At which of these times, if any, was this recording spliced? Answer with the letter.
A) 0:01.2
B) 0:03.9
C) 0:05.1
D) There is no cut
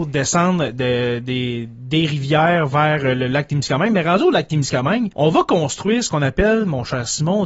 C